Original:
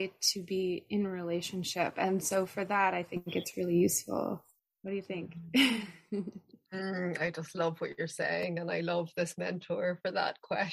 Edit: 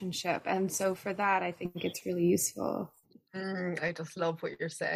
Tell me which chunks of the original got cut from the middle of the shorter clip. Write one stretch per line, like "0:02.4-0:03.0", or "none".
0:04.5-0:06.4